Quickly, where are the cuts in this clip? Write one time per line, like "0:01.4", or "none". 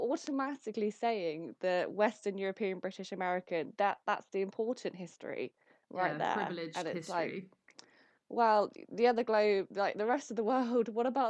none

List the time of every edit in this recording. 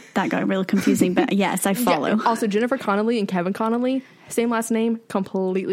none

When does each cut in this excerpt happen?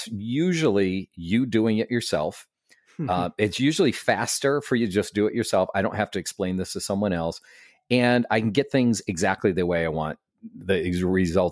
none

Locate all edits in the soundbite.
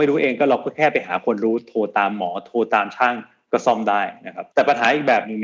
0:04.5

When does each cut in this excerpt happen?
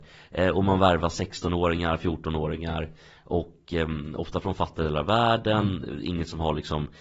none

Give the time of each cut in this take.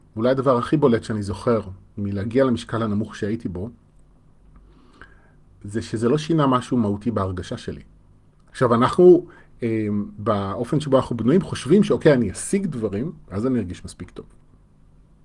0:08.5

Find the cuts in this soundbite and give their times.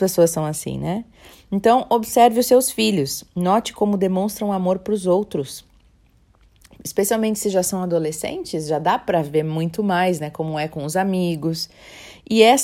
none

